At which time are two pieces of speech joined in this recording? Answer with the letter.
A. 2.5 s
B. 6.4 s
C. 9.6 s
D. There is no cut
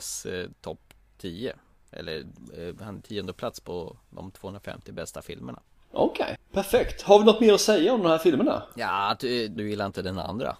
C